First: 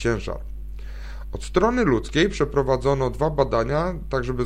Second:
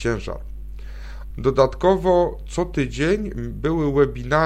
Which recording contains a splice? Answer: second; 1 cut; at 1.3 s

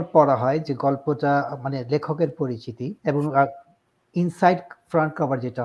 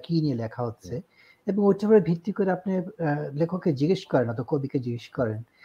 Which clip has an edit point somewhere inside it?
first; 1 cut; at 3.0 s

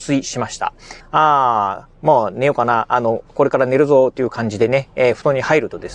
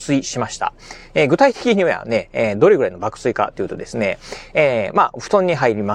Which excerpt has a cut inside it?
first; 1 cut; at 1.0 s

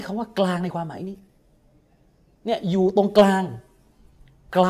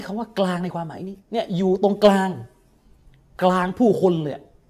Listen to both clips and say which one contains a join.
second; 1 cut; at 1.2 s

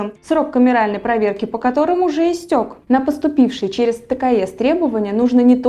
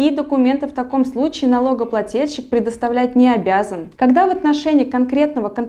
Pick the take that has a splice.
first; 1 cut; at 2.8 s

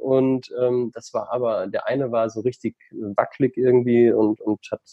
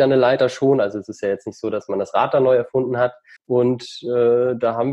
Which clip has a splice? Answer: second; 1 cut; at 3.4 s

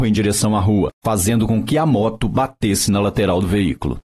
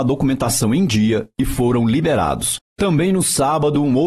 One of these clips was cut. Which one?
second; 1 cut; at 2.7 s

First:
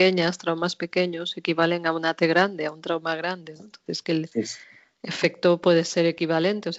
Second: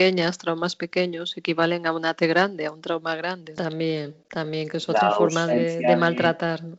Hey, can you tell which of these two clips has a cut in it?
second; 1 cut; at 3.6 s

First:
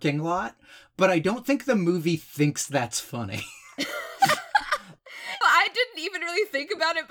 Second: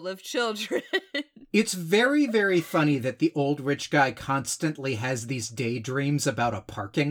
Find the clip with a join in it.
first; 1 cut; at 5.4 s

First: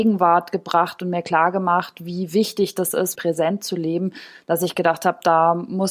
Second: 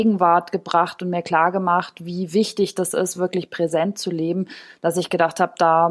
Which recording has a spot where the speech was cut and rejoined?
first; 1 cut; at 3.1 s

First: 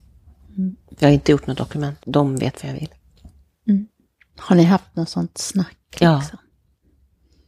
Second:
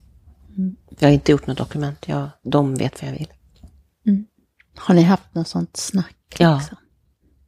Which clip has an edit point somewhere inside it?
first; 1 cut; at 2.0 s

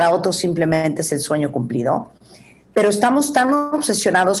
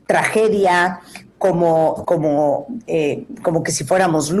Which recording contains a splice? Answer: second; 1 cut; at 2.0 s

